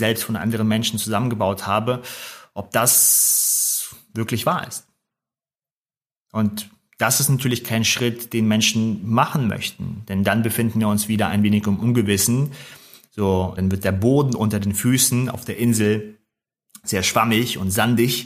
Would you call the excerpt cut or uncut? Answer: cut